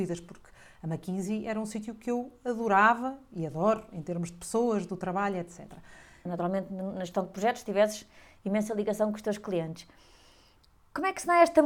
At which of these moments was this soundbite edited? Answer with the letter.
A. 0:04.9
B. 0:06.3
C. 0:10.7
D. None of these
B